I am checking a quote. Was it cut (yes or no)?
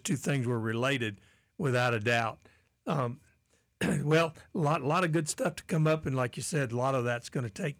no